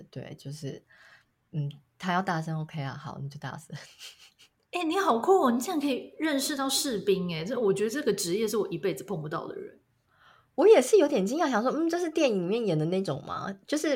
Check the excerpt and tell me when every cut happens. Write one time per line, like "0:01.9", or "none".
none